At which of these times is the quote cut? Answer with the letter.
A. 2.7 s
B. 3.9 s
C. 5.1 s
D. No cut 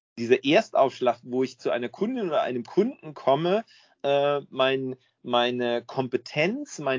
D